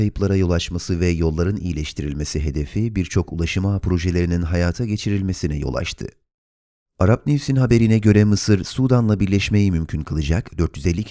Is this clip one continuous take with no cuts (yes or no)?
yes